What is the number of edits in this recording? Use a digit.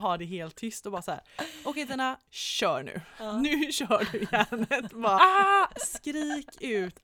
1